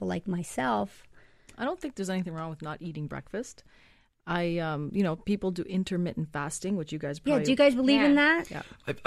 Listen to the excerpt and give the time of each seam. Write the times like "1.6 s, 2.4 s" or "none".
none